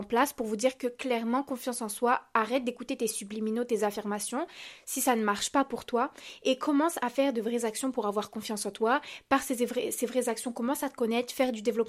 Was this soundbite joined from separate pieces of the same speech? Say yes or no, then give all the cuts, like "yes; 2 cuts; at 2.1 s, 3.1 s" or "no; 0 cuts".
no; 0 cuts